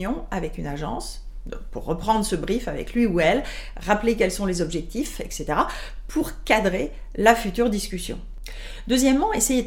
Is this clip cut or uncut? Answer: uncut